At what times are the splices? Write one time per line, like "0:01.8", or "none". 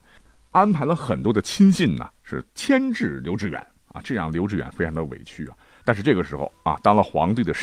0:05.8